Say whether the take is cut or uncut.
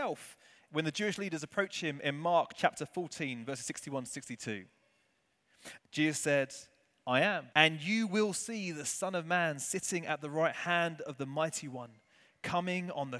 cut